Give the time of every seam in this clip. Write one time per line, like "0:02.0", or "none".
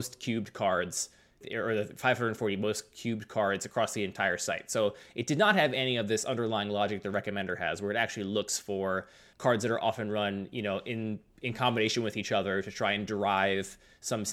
none